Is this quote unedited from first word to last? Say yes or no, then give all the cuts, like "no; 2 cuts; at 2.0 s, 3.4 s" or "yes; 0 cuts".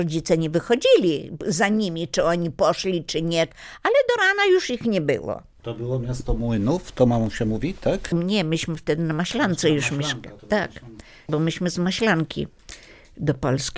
yes; 0 cuts